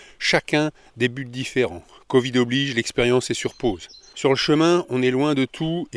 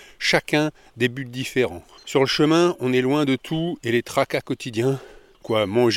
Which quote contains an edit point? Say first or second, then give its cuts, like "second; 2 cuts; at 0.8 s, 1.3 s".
second; 1 cut; at 2.0 s